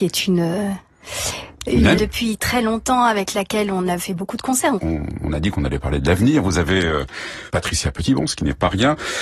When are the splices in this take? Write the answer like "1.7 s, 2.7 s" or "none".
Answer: 1.9 s, 4.8 s, 7.5 s